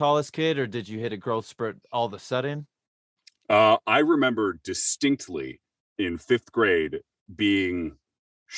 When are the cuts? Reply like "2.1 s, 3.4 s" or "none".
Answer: none

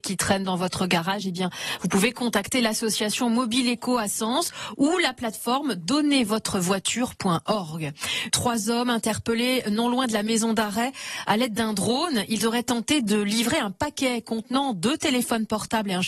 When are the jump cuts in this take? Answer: 8.3 s

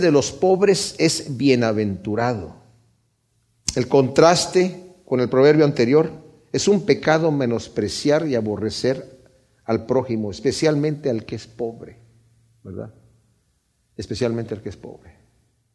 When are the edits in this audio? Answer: none

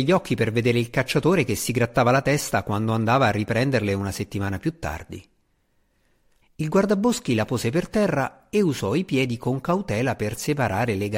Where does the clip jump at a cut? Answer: 6.4 s

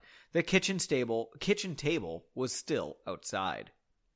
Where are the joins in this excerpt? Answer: none

